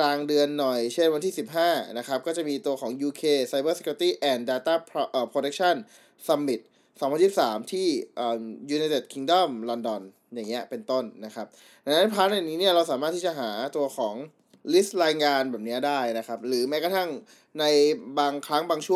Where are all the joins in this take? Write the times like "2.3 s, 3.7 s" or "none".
none